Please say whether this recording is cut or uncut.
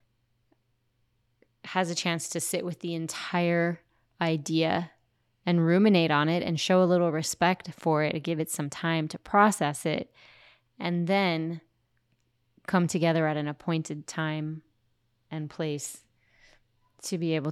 uncut